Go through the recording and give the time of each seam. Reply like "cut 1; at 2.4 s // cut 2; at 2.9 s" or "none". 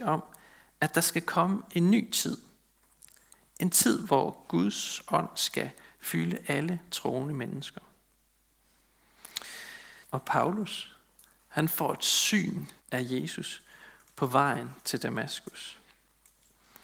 cut 1; at 10.0 s // cut 2; at 12.8 s